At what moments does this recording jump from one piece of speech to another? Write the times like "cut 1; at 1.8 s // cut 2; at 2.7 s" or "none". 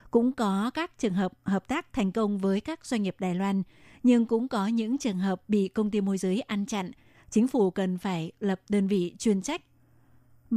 none